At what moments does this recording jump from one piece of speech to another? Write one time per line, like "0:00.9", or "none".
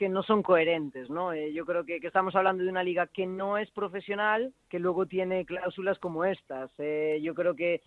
0:04.6